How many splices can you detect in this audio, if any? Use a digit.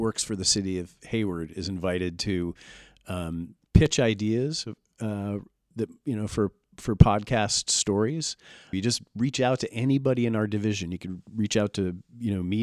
2